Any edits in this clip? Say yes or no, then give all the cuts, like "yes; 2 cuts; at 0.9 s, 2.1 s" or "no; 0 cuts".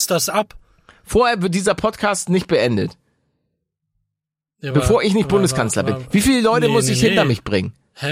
no; 0 cuts